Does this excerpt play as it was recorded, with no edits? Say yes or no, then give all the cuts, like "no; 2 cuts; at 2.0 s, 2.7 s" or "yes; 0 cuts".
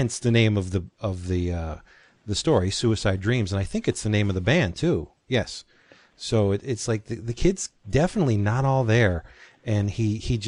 yes; 0 cuts